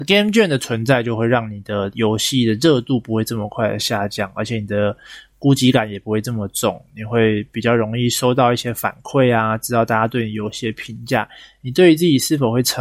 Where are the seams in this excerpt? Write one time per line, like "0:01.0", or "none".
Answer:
none